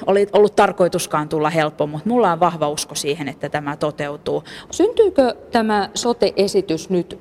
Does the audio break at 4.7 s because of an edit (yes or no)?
yes